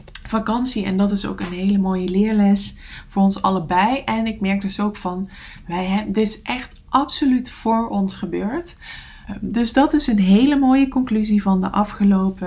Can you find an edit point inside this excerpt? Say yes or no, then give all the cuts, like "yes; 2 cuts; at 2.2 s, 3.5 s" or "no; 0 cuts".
yes; 1 cut; at 9.2 s